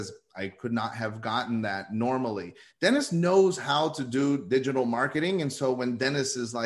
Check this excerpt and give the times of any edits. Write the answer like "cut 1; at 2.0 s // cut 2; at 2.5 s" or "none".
cut 1; at 2.7 s